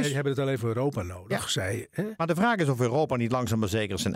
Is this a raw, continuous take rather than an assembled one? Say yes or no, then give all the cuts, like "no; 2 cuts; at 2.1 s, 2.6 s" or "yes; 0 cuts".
yes; 0 cuts